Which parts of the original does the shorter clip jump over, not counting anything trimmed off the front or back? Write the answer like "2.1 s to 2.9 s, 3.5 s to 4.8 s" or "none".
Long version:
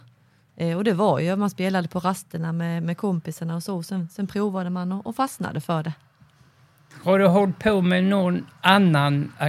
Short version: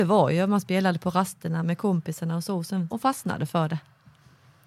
2.5 s to 2.8 s, 4.1 s to 5.0 s